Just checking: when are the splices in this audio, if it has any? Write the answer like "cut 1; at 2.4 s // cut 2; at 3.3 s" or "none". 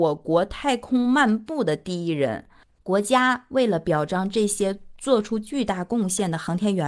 cut 1; at 2.8 s

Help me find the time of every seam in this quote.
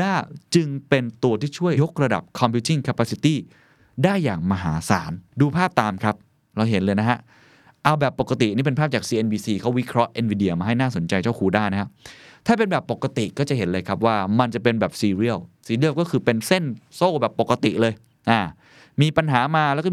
cut 1; at 1.7 s // cut 2; at 5.3 s // cut 3; at 16.8 s

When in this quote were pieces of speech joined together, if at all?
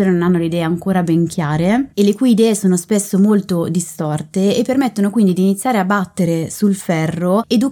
none

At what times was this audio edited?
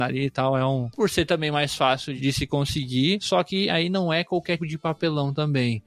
cut 1; at 0.9 s // cut 2; at 4.6 s

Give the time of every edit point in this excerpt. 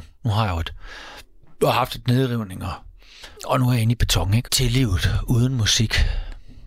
cut 1; at 3.4 s // cut 2; at 4.5 s

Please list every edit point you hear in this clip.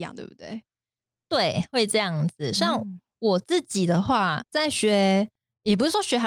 cut 1; at 4.4 s

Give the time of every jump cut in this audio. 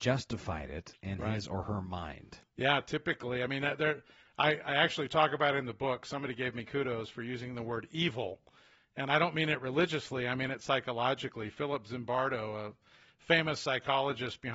none

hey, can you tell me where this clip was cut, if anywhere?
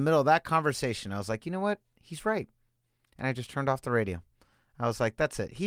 none

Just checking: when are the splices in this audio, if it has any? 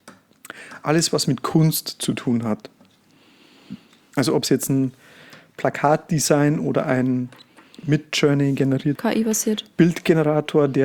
cut 1; at 9.0 s

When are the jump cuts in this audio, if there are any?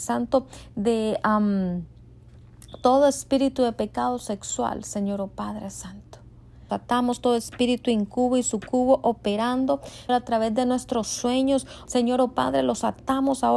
cut 1; at 6.7 s // cut 2; at 10.1 s // cut 3; at 11.9 s

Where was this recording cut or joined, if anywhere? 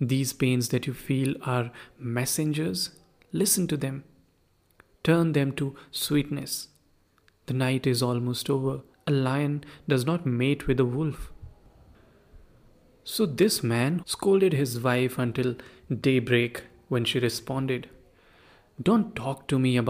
cut 1; at 8.9 s // cut 2; at 14.0 s

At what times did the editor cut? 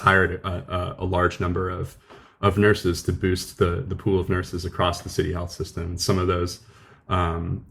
none

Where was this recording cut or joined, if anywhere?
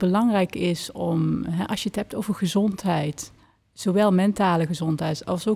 none

